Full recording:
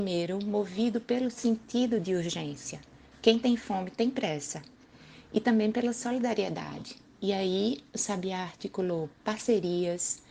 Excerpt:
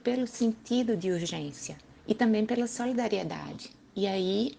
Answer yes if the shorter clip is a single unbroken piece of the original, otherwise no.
no